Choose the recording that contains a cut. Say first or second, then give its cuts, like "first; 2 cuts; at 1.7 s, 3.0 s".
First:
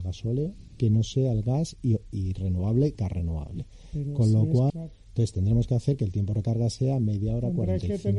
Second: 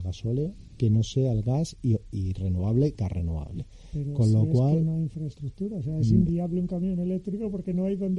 first; 1 cut; at 4.7 s